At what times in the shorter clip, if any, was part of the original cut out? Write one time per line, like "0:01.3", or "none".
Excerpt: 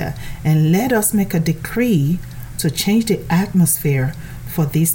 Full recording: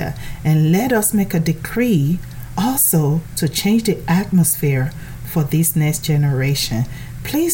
0:02.5